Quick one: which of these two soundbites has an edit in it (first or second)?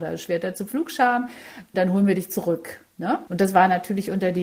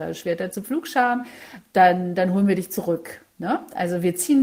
first